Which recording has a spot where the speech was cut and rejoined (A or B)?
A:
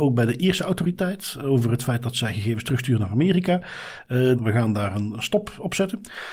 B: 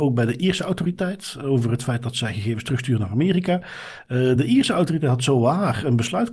A